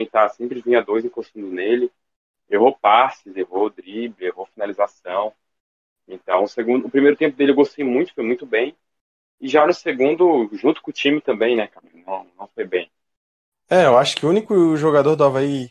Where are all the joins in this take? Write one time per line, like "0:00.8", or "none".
none